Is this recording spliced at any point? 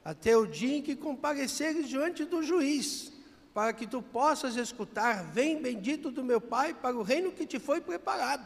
no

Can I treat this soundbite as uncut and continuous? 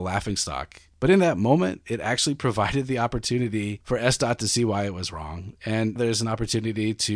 no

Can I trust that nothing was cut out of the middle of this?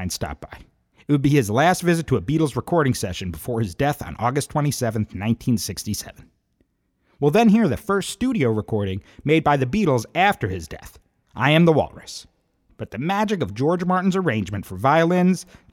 no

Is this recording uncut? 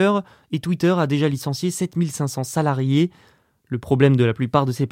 yes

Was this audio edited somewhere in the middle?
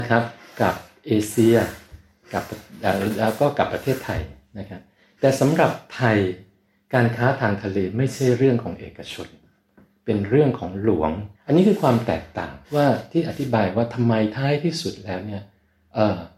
yes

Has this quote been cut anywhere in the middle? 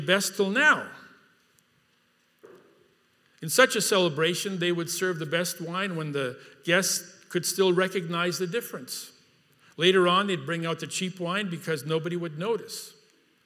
no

